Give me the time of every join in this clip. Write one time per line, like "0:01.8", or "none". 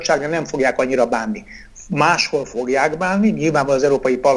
none